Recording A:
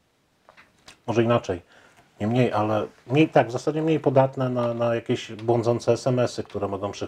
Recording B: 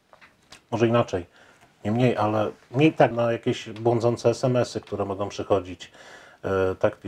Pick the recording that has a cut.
B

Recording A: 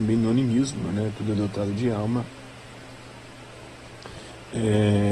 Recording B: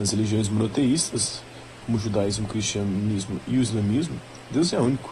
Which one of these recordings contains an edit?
B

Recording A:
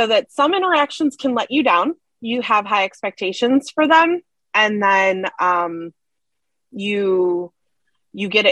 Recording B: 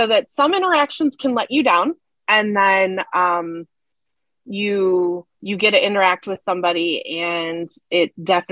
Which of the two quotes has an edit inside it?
B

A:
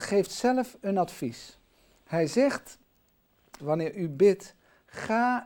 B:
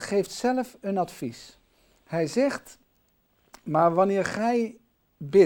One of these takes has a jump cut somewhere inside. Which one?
A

